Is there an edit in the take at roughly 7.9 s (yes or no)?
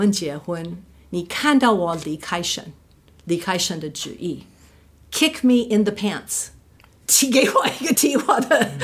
yes